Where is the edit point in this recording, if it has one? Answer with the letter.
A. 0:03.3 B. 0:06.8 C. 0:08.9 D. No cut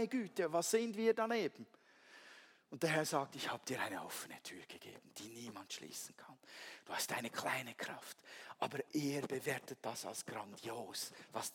D